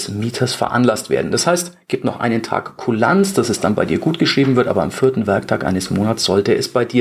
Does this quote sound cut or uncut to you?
uncut